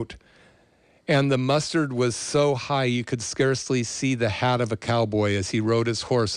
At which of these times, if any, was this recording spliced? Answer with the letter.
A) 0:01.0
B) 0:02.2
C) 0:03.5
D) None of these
D